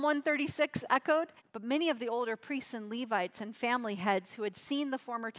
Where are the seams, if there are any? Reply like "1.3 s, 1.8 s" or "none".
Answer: 1.4 s